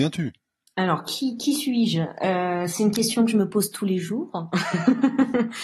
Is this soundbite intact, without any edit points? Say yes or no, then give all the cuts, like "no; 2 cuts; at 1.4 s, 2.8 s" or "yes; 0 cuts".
yes; 0 cuts